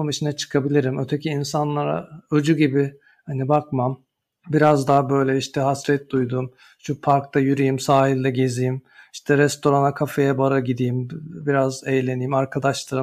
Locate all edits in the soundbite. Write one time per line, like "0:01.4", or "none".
none